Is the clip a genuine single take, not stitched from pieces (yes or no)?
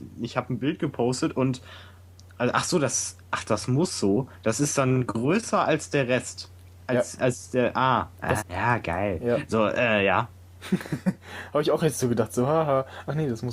no